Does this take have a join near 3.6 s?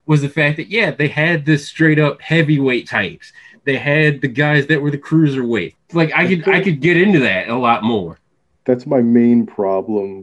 no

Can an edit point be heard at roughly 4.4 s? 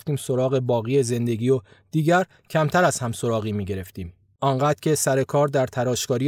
yes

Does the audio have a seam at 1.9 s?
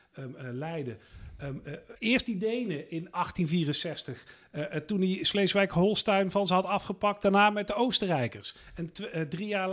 yes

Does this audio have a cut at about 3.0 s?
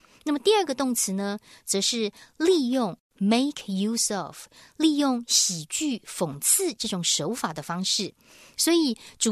no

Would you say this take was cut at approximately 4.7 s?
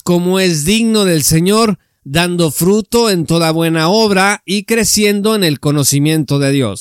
no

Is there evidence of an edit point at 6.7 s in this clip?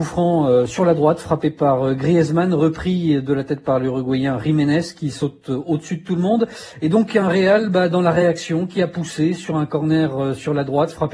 no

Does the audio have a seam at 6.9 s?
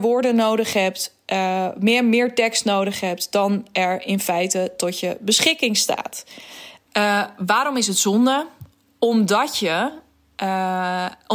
yes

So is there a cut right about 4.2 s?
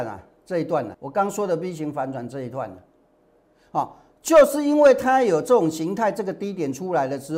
no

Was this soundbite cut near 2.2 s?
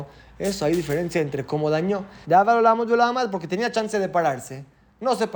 yes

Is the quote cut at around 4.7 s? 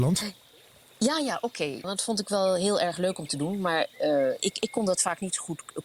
no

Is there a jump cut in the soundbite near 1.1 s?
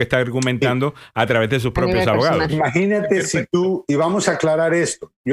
no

